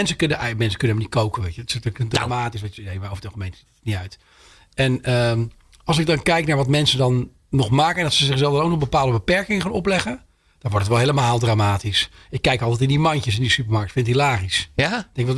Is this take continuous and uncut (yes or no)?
yes